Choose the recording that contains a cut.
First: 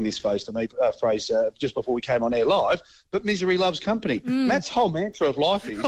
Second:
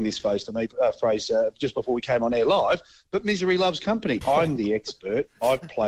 second; 1 cut; at 4.2 s

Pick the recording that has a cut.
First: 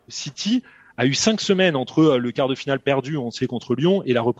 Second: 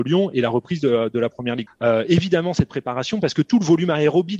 second; 1 cut; at 1.7 s

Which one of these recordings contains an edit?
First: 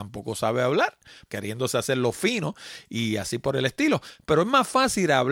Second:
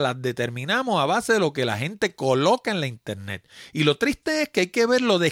first; 1 cut; at 1.3 s

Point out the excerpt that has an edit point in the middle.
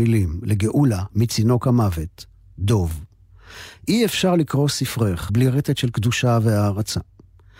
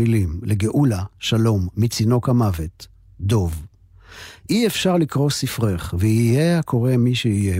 first; 2 cuts; at 1.1 s, 5.3 s

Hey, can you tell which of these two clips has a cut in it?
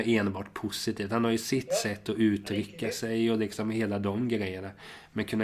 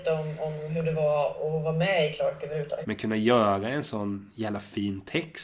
second; 1 cut; at 2.8 s

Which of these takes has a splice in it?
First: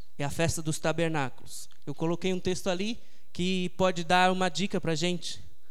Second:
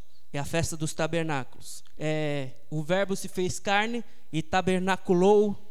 second; 1 cut; at 1.9 s

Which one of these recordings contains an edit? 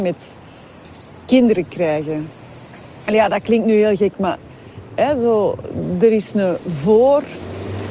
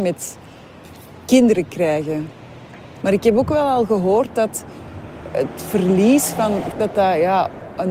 second; 2 cuts; at 3.0 s, 6.7 s

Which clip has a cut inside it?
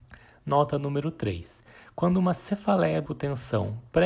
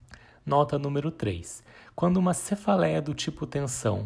first; 1 cut; at 3.1 s

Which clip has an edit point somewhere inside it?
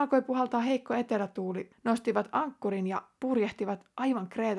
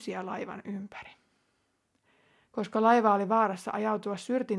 first; 1 cut; at 1.7 s

